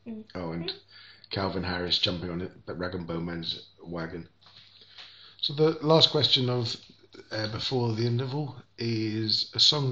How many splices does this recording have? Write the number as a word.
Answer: zero